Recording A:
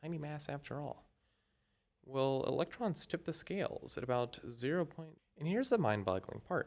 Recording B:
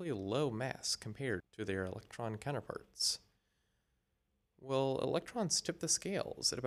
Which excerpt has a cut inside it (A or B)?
A